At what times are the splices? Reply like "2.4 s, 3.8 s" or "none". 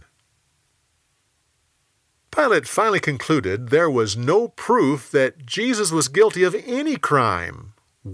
none